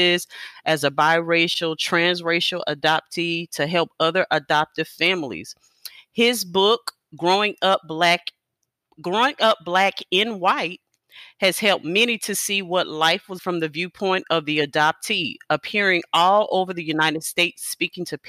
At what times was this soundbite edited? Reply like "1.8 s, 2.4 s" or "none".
13.4 s